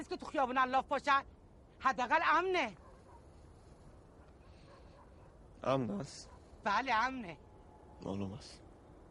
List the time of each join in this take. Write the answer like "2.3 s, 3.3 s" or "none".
none